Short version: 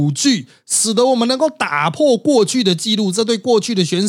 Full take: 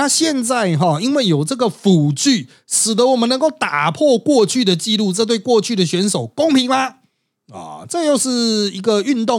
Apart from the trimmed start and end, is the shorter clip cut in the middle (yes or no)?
no